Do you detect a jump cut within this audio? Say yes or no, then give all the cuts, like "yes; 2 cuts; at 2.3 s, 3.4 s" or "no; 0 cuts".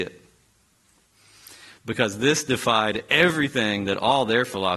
yes; 1 cut; at 1.0 s